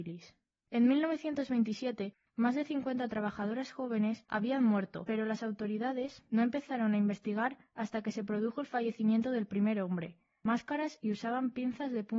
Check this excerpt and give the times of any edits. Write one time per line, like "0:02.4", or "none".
0:10.4

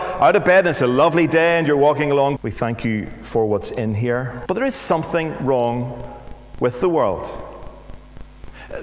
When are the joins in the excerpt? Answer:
0:02.4
0:04.5

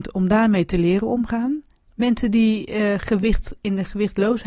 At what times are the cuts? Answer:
0:01.9

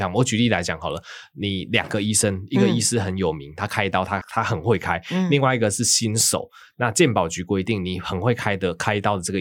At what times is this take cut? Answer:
0:04.2

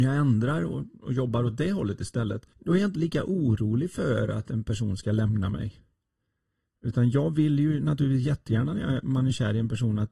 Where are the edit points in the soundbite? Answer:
0:02.5

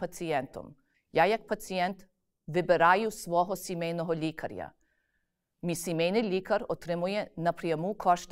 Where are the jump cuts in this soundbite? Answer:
0:00.9

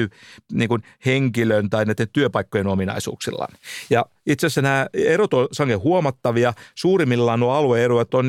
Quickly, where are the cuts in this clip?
none

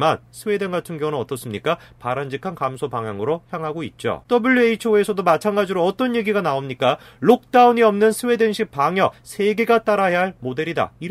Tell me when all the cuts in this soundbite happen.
none

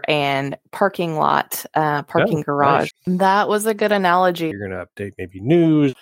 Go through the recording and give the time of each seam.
0:02.9
0:04.5

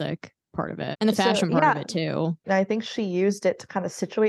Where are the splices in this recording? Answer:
0:00.9
0:02.4

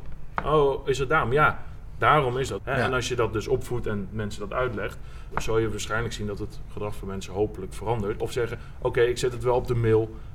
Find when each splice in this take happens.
0:02.6
0:05.3
0:08.2

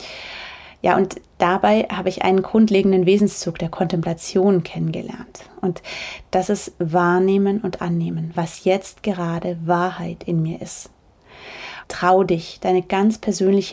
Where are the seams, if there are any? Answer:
0:08.4
0:11.8

